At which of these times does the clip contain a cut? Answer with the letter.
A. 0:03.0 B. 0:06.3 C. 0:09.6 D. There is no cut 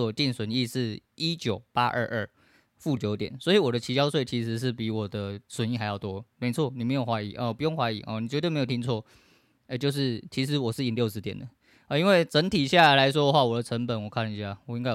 A